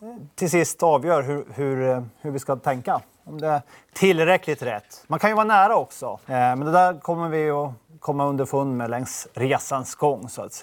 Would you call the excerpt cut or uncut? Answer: cut